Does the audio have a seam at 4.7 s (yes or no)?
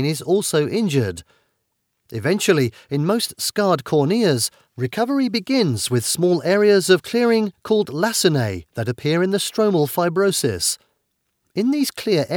yes